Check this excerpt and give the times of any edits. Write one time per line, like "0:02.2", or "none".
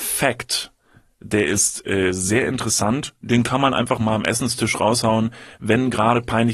none